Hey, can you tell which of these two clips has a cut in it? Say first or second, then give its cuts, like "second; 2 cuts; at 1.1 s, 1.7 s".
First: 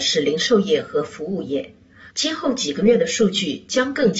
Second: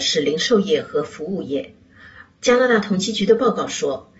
first; 1 cut; at 2.1 s